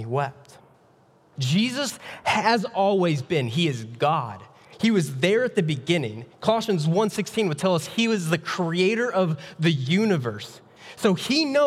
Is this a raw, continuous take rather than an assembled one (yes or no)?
no